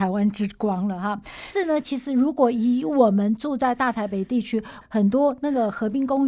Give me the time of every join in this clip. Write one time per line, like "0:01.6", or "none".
0:01.5
0:04.8